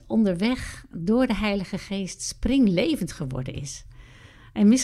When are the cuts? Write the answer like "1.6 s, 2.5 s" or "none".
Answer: none